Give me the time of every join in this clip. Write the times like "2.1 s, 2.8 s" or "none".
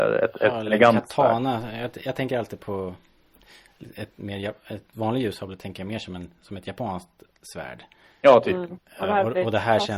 4.9 s, 7.4 s, 8.8 s